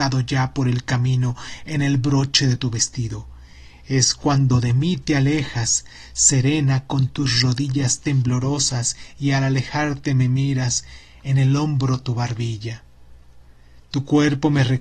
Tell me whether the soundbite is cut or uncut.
uncut